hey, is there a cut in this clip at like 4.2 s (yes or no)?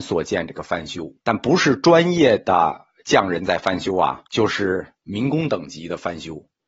yes